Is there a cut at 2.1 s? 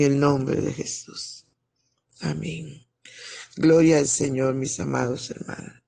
no; 0 cuts

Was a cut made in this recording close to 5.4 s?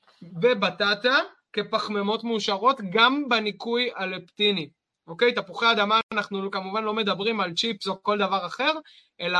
no; 0 cuts

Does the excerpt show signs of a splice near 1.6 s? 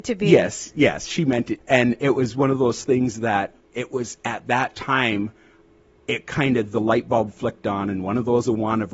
yes; 1 cut; at 1.6 s

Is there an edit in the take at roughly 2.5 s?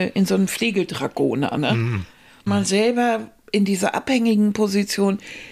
yes; 1 cut; at 2.5 s

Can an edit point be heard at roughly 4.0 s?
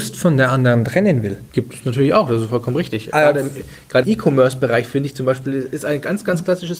yes; 2 cuts; at 1.5 s, 4.0 s

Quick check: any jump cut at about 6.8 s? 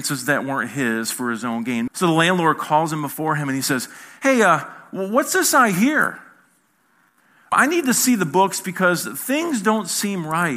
no; 1 cut; at 1.9 s

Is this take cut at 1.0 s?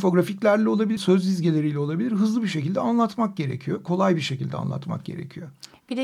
yes; 1 cut; at 1.0 s

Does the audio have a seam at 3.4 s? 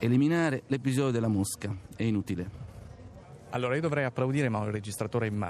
no; 0 cuts

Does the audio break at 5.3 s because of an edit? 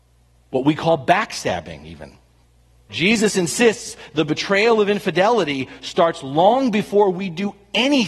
no; 1 cut; at 2.9 s

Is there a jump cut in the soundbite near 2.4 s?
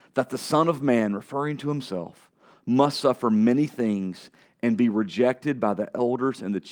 no; 0 cuts

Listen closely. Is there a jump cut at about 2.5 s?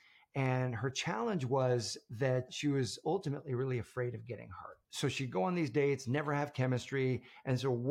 yes; 1 cut; at 2.5 s

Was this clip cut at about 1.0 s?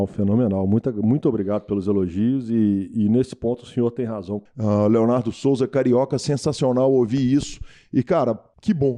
no; 1 cut; at 4.5 s

